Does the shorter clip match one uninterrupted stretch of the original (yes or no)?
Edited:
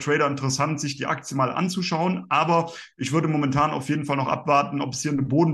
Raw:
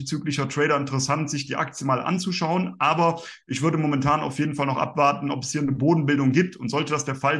yes